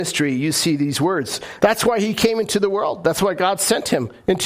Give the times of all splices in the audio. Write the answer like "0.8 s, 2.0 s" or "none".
1.6 s